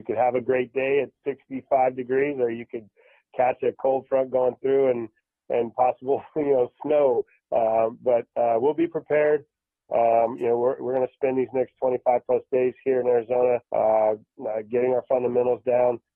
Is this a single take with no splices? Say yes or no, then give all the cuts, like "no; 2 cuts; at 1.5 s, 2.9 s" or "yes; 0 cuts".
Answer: no; 1 cut; at 13.7 s